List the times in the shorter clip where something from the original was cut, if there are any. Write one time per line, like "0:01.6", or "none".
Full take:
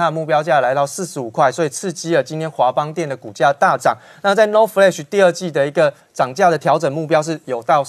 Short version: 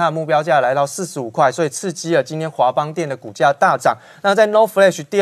none